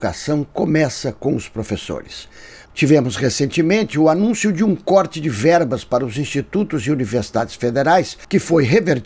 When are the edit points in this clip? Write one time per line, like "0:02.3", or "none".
0:02.7